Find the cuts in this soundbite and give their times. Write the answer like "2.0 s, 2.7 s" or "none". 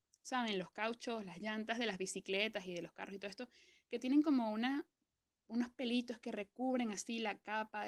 none